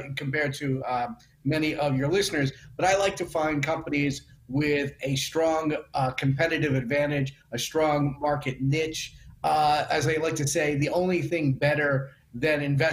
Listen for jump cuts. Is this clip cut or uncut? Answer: uncut